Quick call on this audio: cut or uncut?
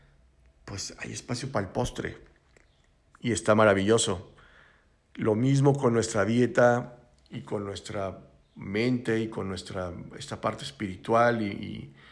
uncut